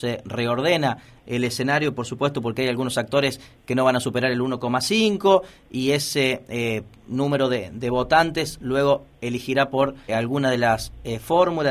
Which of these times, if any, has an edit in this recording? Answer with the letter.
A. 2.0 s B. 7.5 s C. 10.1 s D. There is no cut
C